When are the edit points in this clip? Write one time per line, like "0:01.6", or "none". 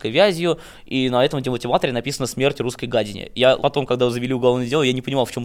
0:03.6